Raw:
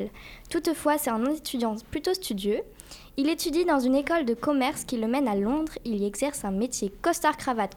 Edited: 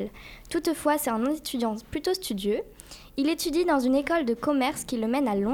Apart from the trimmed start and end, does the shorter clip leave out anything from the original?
no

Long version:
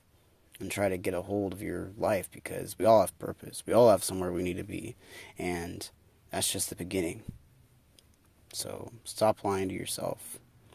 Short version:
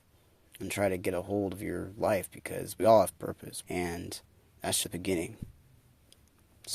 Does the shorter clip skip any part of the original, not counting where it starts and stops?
yes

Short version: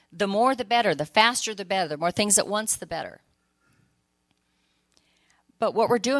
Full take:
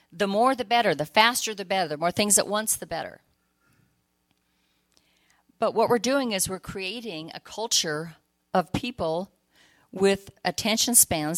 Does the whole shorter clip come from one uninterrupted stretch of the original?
yes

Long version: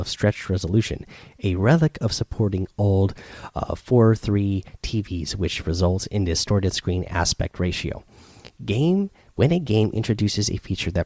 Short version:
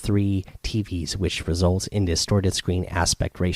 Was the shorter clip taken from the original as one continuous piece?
yes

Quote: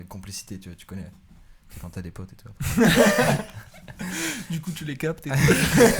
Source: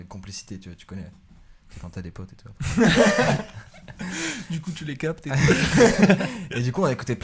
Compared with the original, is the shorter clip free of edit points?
yes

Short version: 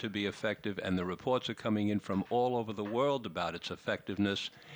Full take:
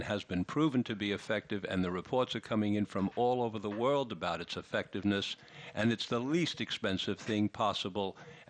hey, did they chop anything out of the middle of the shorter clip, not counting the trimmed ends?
no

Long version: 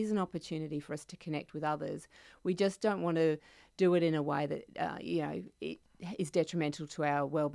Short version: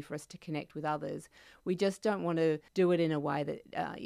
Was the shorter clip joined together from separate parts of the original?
yes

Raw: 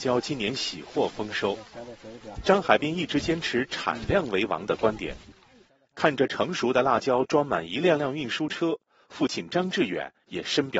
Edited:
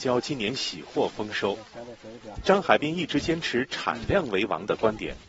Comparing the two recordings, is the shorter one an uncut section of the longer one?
yes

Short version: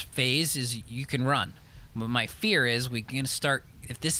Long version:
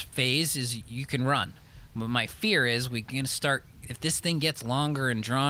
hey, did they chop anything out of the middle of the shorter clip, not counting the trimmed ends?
no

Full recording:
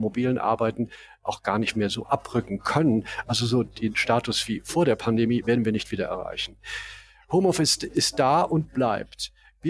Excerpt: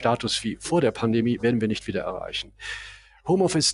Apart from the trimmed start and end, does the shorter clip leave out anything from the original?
no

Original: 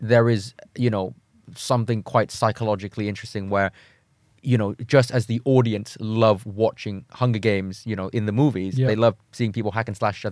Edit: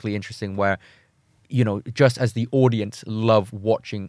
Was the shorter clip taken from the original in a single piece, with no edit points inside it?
yes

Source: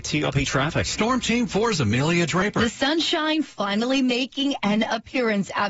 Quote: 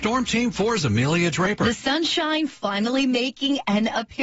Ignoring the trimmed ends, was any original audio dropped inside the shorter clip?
no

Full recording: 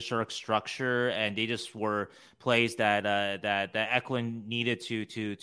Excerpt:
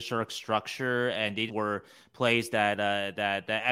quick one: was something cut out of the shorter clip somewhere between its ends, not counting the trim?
yes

